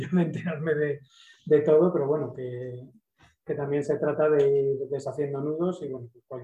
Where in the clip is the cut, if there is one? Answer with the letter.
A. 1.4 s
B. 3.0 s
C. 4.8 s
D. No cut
D